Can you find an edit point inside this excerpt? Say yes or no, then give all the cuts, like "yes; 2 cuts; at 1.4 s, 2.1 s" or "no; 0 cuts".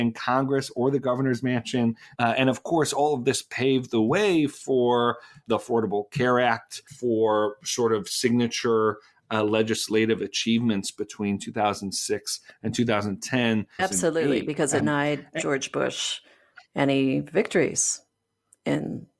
yes; 3 cuts; at 2.2 s, 13.8 s, 14.8 s